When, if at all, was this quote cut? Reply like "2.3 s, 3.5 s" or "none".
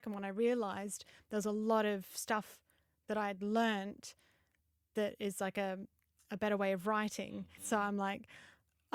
7.6 s